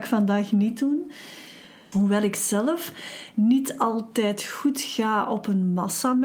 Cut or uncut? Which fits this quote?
cut